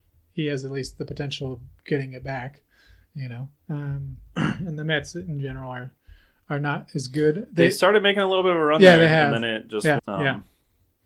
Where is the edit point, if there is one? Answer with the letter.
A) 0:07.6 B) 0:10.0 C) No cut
B